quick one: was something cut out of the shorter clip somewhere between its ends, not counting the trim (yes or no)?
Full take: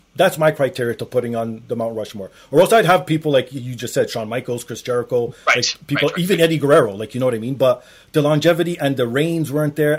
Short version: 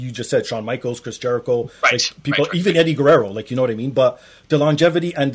no